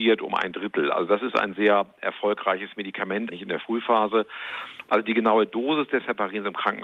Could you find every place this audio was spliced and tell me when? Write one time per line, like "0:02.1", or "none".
0:03.3
0:04.9